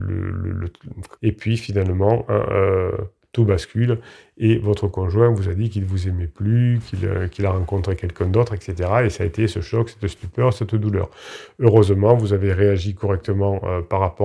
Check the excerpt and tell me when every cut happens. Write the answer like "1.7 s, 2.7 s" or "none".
1.2 s